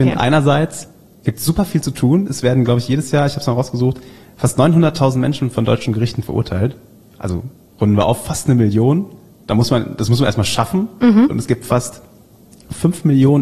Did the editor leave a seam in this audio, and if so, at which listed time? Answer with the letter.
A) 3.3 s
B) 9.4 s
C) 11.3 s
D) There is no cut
C